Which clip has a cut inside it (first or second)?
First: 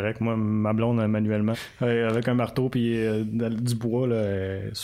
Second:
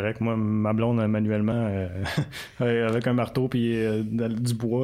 first